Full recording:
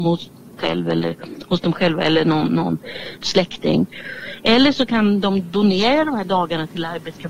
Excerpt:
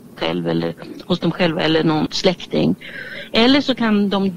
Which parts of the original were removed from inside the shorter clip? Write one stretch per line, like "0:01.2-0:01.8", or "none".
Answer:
0:02.5-0:03.2

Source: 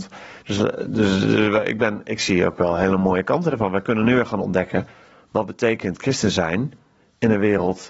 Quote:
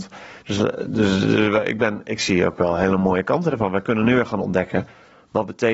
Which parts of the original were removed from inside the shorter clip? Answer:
none

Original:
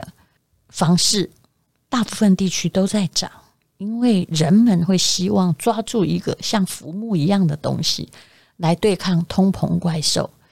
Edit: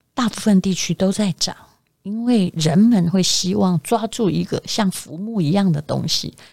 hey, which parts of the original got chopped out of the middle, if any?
none

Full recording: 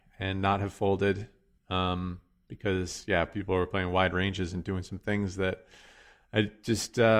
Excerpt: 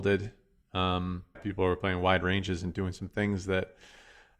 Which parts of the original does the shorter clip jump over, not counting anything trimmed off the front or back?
0:02.3-0:03.3

